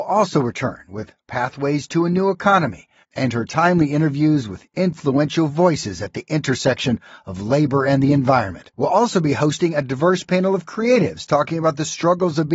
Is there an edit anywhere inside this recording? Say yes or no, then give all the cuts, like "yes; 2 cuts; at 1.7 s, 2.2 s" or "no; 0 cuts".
yes; 2 cuts; at 3.0 s, 8.7 s